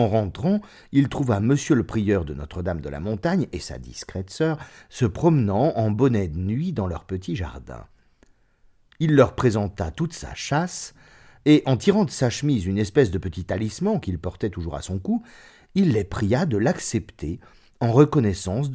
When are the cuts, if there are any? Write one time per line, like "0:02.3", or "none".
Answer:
none

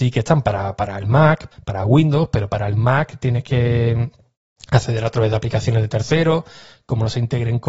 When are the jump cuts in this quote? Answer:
0:01.5

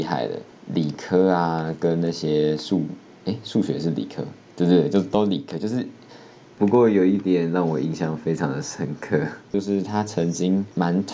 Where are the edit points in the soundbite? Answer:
0:06.5

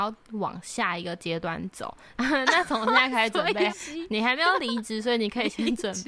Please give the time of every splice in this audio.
0:02.2
0:03.7

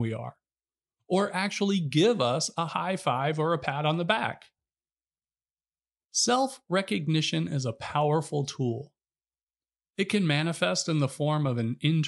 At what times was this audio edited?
0:06.0

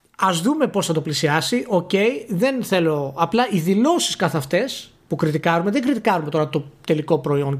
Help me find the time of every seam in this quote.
none

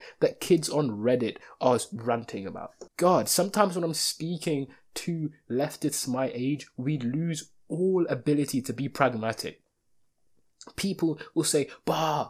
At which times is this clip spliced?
0:02.9

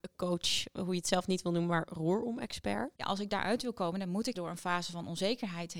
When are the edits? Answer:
0:02.9
0:04.3

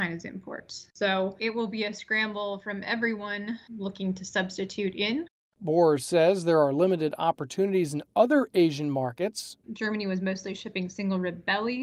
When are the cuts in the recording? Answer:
0:09.6

